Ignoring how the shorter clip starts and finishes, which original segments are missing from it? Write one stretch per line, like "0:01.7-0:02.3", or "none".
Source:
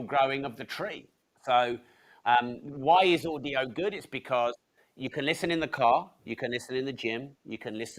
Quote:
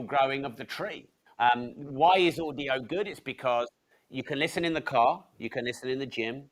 0:01.3-0:02.1